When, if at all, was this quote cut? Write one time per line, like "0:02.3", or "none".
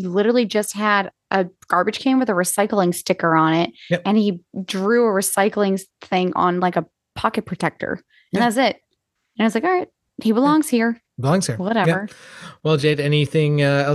none